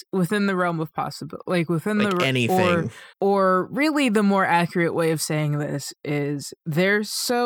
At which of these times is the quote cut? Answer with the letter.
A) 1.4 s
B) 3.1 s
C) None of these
B